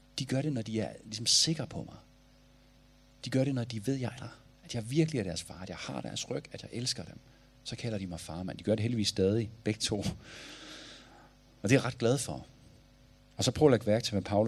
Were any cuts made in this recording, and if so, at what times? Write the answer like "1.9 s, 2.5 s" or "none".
4.2 s

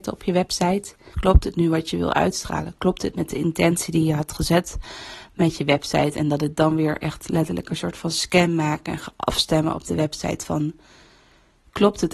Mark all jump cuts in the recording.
1.1 s

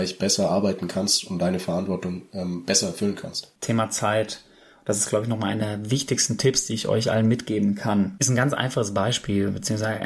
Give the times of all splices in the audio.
3.6 s

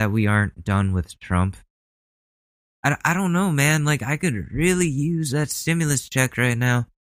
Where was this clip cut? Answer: 2.7 s

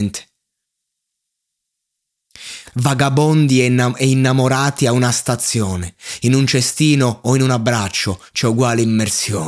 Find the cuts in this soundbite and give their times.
2.7 s

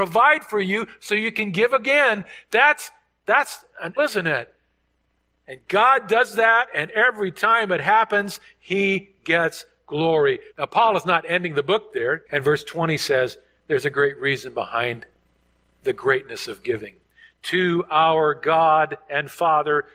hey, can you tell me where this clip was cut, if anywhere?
4.0 s, 10.5 s, 12.3 s

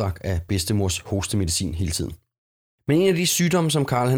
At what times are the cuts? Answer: none

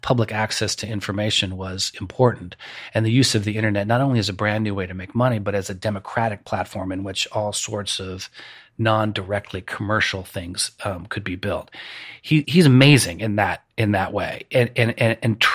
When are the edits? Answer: 12.4 s

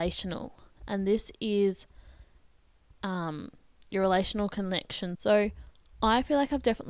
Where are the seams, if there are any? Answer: 5.2 s

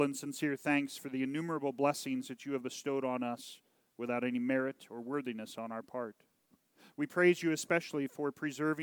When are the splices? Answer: none

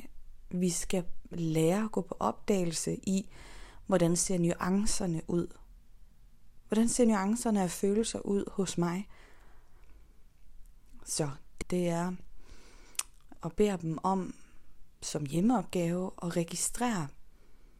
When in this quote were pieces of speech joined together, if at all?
11.6 s, 13.3 s

